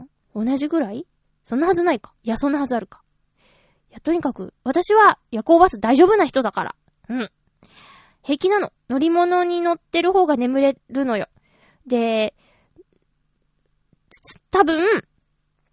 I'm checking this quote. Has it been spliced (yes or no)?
no